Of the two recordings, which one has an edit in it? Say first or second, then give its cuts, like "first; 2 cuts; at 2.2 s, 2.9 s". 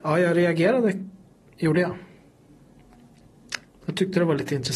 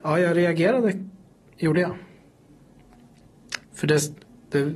second; 1 cut; at 3.6 s